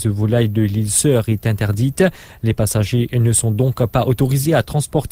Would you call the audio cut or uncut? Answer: uncut